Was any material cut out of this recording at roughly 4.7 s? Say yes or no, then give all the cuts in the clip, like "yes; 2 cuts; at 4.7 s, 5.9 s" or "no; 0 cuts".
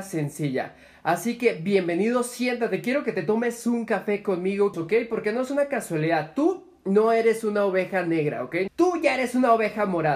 yes; 2 cuts; at 4.7 s, 8.7 s